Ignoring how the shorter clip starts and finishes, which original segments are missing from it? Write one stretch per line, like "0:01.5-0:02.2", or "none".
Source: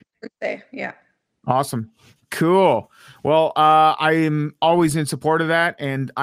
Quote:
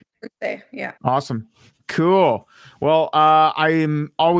0:01.0-0:01.4